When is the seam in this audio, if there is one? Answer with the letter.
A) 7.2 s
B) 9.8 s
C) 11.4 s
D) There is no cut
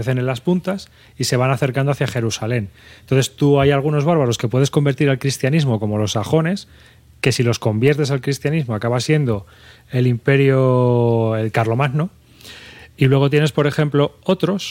D